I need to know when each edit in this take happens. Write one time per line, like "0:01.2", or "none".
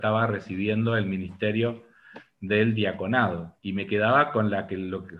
0:03.6